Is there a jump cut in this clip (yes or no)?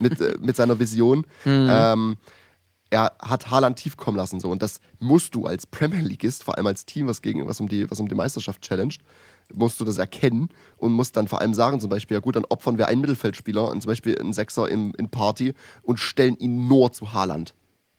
yes